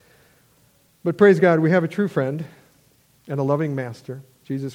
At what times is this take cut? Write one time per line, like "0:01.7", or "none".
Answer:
none